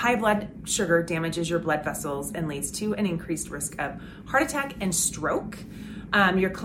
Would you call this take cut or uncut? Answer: uncut